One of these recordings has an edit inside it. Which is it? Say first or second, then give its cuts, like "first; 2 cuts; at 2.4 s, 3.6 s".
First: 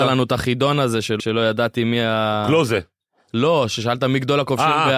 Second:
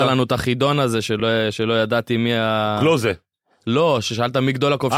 first; 1 cut; at 1.2 s